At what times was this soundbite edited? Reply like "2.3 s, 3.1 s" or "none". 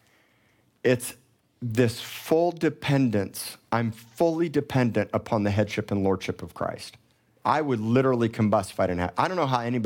7.4 s

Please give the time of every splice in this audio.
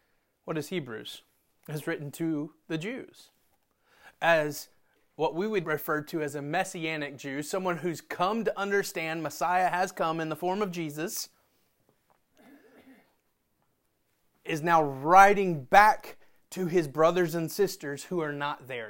5.6 s

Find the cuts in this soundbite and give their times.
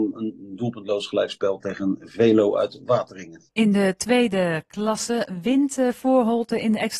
3.5 s

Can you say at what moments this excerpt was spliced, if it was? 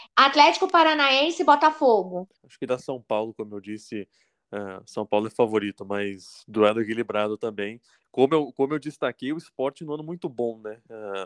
2.3 s

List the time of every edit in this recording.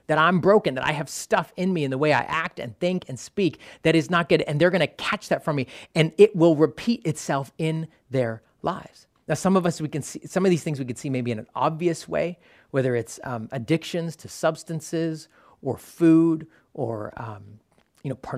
none

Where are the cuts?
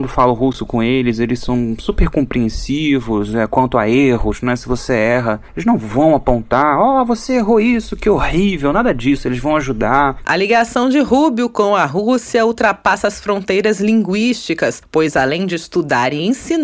10.2 s

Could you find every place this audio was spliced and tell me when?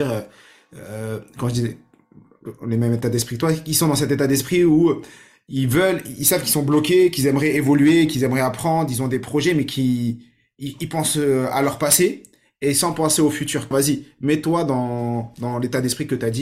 13.7 s

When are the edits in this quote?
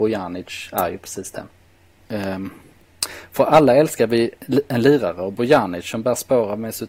2.0 s

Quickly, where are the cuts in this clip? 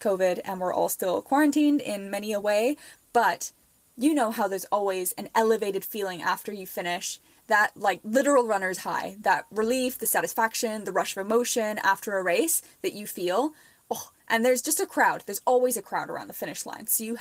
none

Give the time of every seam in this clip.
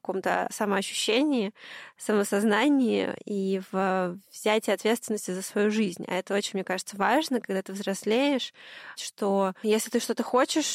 9.0 s

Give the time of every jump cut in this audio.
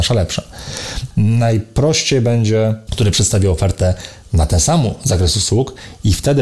1.1 s, 2.9 s

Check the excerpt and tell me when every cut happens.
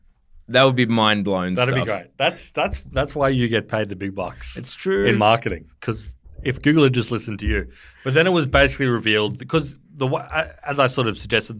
none

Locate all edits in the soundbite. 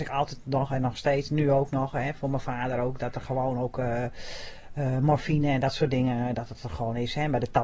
none

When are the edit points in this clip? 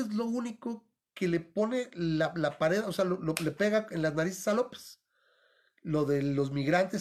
none

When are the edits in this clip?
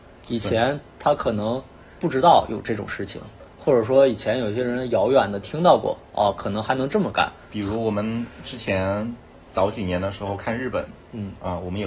none

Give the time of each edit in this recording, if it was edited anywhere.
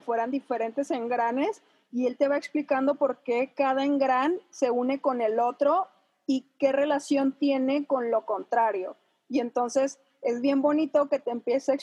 none

